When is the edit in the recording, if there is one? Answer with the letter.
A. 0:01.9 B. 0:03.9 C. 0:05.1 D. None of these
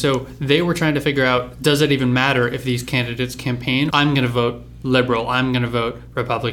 B